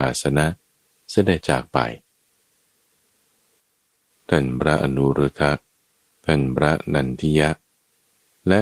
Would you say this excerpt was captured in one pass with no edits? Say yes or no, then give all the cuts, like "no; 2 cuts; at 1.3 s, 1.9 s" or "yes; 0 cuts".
no; 1 cut; at 1.4 s